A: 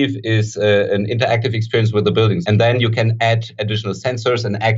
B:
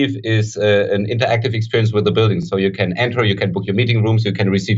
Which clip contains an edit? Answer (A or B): A